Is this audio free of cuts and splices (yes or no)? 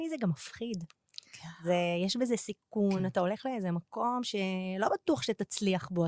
yes